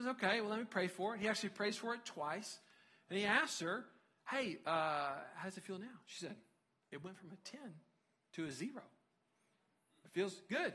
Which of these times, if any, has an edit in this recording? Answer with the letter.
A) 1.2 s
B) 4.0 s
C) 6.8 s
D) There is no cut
C